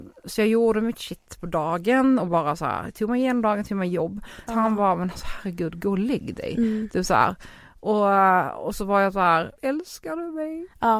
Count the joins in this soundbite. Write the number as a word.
two